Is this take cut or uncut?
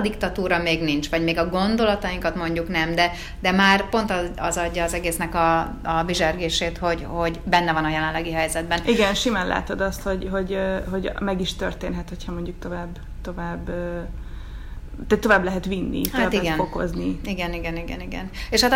uncut